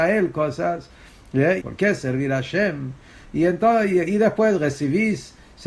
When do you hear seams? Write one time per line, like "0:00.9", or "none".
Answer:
0:01.6
0:03.2